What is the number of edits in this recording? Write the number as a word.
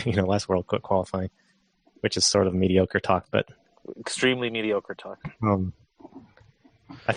zero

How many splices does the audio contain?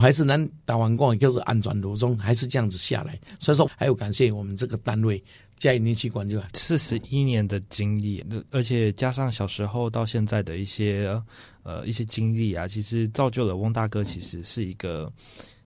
three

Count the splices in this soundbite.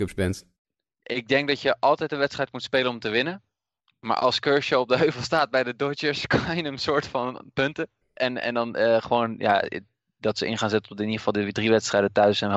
one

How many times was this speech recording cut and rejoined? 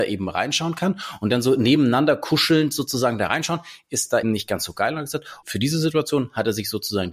two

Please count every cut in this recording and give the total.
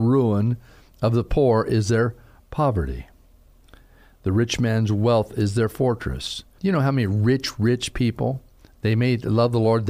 one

